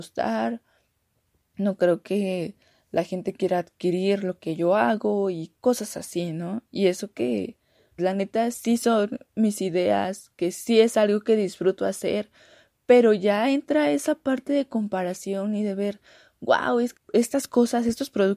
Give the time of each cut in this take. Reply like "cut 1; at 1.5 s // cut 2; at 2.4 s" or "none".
cut 1; at 8.0 s // cut 2; at 17.0 s